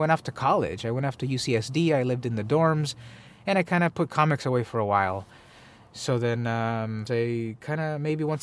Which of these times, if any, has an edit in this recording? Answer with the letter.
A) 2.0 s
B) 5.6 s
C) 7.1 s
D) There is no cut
C